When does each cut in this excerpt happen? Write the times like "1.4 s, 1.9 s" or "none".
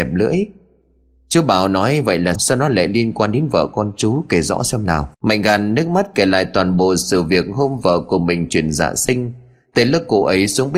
2.3 s, 5.1 s